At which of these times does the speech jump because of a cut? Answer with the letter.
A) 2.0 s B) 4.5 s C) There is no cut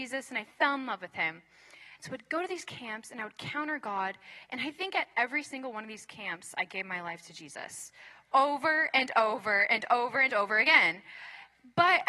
A